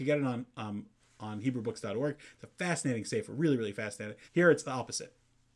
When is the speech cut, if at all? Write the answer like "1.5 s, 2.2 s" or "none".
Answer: 4.3 s